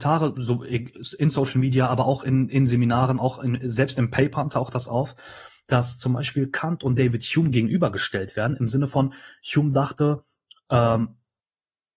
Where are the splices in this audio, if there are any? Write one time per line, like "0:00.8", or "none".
none